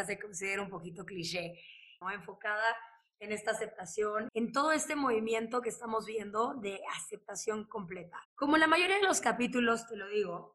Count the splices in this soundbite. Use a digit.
3